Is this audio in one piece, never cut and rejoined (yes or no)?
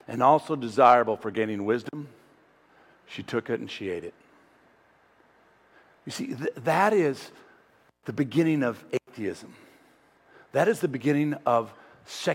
yes